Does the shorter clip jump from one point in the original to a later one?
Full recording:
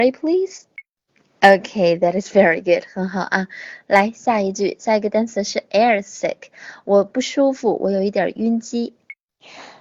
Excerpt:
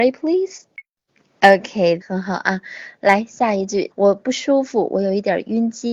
yes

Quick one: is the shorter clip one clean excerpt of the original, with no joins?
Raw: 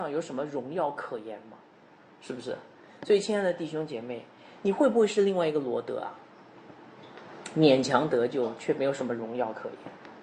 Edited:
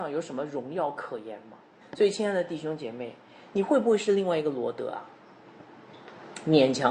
no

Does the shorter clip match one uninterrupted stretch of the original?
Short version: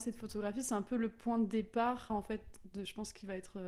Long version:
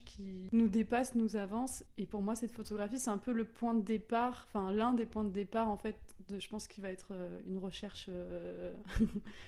no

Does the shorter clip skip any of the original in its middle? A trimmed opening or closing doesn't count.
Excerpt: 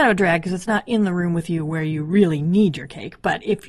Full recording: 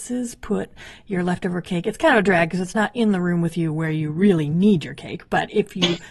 no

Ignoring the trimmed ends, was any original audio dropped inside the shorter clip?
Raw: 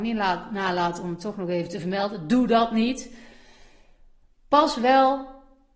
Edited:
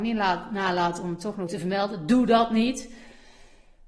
yes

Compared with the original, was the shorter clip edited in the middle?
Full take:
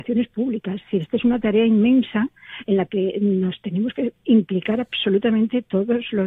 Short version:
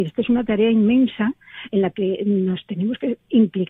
no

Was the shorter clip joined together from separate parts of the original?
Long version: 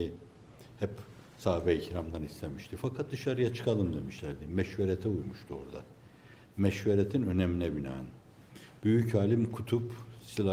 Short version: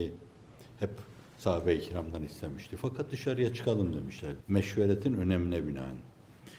yes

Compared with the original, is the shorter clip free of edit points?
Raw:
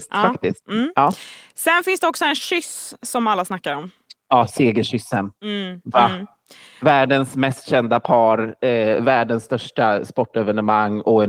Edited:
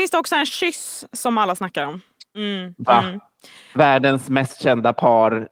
no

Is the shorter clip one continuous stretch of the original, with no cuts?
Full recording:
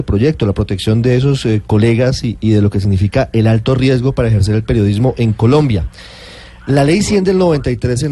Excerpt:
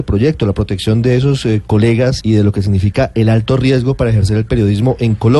no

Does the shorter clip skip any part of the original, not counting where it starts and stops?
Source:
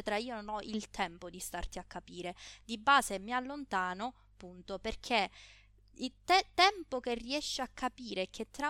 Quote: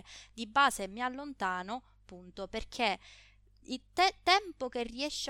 no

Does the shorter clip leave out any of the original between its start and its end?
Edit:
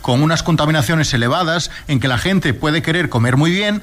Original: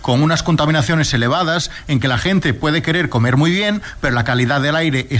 no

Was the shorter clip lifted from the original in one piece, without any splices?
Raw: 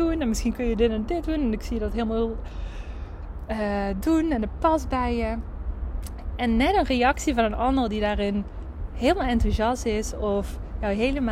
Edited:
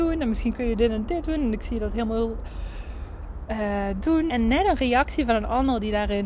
no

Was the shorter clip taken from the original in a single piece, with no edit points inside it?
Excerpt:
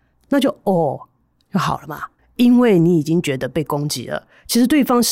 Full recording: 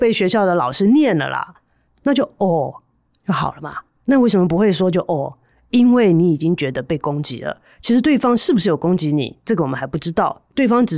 no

